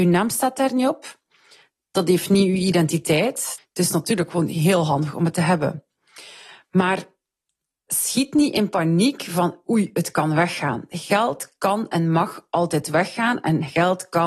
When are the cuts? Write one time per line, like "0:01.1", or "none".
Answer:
0:03.6